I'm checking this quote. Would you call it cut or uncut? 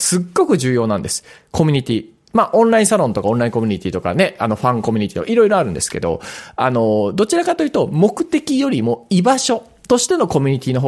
uncut